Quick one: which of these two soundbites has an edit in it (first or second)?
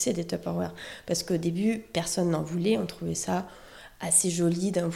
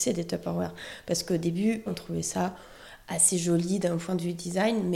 second